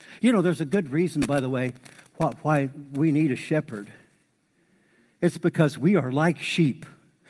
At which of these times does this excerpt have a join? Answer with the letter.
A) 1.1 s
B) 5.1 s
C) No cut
C